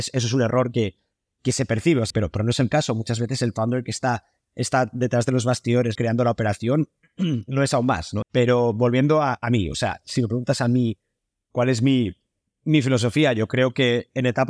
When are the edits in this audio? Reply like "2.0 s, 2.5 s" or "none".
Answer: 2.1 s, 6.0 s, 8.2 s

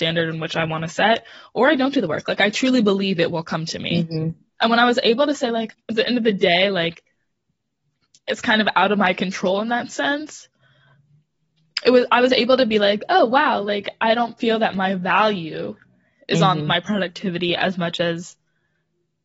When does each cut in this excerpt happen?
5.7 s

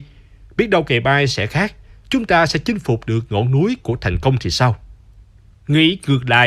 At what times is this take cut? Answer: none

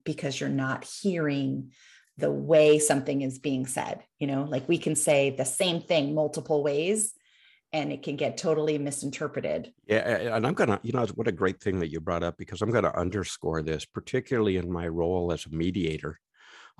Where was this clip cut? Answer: none

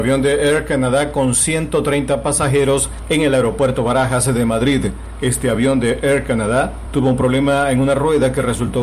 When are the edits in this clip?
5.2 s

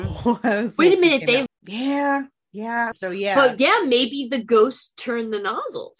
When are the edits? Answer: 1.5 s, 2.9 s

